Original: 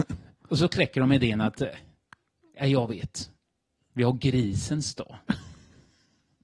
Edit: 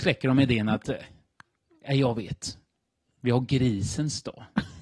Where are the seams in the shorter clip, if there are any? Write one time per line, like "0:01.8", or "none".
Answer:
none

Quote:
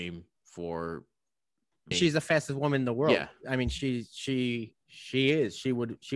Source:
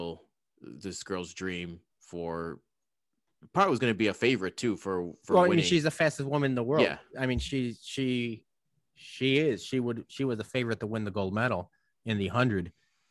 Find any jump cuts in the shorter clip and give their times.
0:01.9
0:04.8

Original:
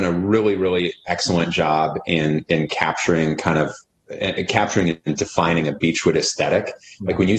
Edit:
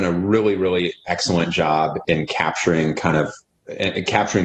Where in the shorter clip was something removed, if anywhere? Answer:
0:02.0

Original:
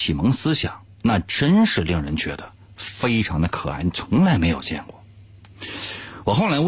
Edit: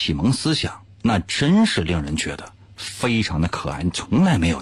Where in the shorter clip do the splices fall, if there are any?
none

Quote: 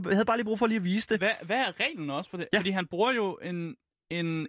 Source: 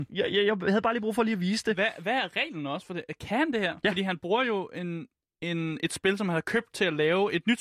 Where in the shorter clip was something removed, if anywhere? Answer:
0:02.5

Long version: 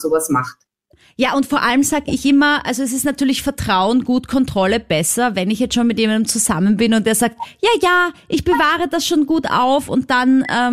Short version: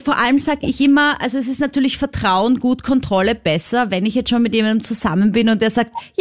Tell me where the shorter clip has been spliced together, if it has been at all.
none

